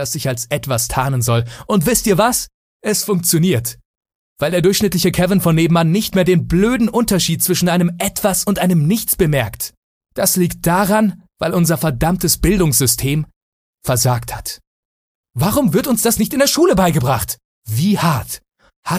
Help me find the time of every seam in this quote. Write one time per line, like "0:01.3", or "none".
0:10.0
0:11.3